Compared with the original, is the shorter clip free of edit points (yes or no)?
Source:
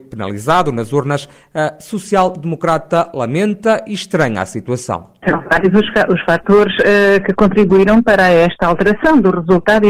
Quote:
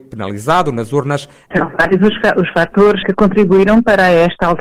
no